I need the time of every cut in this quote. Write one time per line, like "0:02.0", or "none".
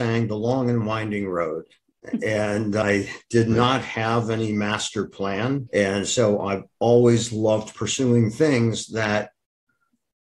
0:05.7